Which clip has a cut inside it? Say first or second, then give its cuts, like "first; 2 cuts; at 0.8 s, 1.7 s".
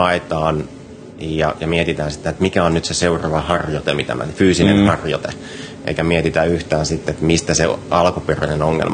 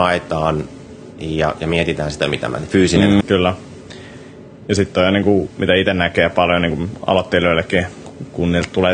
second; 2 cuts; at 2.2 s, 3.2 s